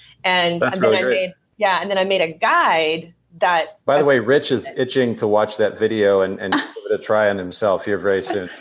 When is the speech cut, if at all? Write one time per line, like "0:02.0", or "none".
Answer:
none